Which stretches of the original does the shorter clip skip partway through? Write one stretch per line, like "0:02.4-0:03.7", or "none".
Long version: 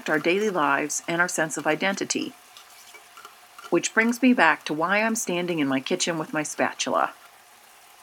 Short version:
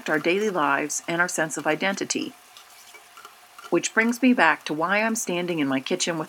none